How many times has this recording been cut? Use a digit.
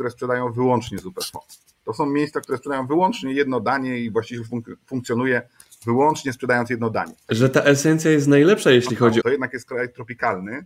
2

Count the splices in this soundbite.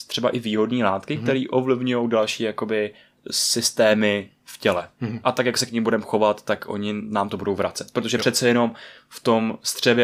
0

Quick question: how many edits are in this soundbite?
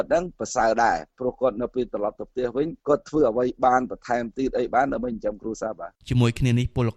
1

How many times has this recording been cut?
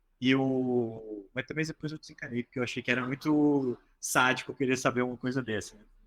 0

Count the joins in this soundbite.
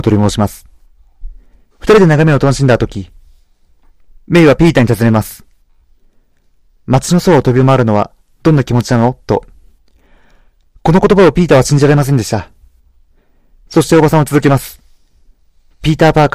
1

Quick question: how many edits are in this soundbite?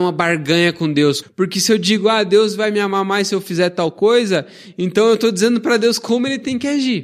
1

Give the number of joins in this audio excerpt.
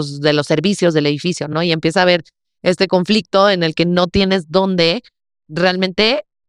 0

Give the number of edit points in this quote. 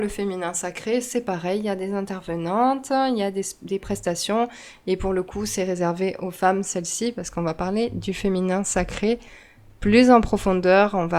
0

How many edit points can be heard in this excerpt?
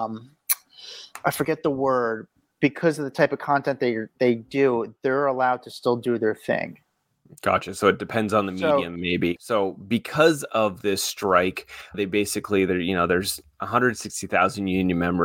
2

